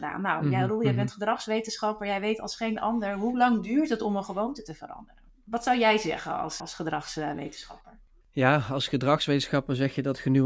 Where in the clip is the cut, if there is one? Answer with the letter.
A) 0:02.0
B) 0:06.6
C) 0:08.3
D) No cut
B